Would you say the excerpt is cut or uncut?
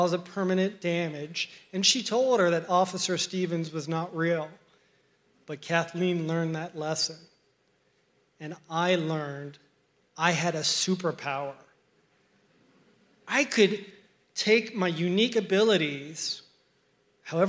uncut